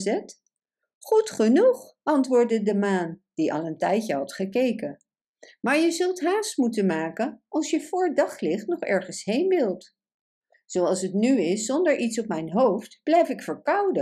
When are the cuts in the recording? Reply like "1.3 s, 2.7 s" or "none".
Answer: 10.5 s

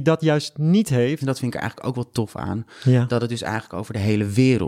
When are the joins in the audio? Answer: 1.2 s

